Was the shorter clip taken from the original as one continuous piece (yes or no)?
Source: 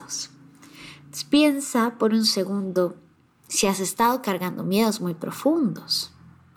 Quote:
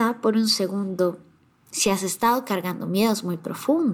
yes